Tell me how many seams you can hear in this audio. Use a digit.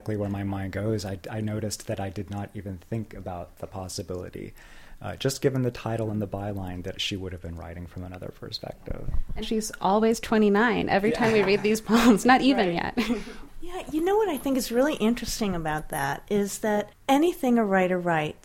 1